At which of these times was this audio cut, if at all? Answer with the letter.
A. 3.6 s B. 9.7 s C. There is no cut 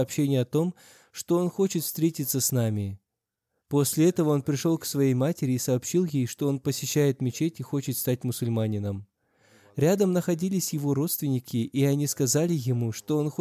A